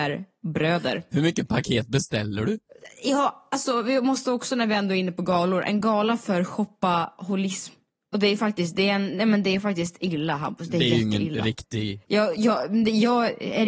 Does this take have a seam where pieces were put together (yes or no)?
no